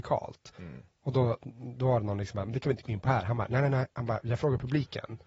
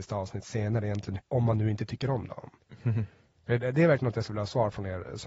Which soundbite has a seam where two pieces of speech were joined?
second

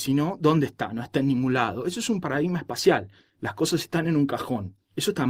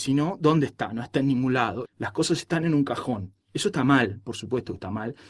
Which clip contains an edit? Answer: second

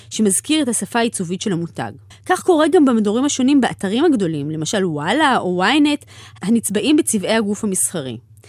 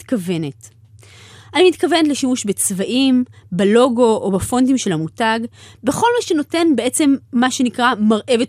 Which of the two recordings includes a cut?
first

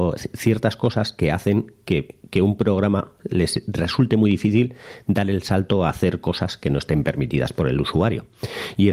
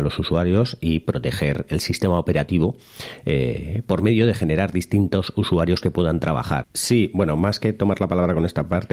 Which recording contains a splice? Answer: second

